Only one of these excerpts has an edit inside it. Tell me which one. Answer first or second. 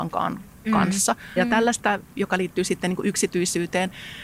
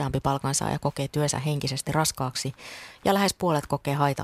first